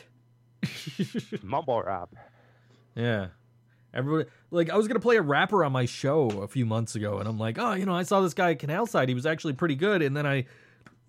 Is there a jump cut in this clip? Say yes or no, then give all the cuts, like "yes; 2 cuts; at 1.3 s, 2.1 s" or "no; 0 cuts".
no; 0 cuts